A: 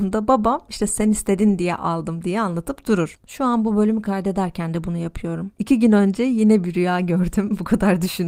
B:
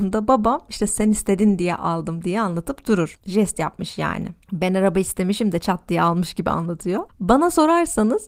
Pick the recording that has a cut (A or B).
A